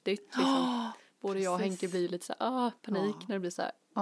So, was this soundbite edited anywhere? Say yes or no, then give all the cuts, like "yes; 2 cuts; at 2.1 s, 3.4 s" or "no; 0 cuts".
no; 0 cuts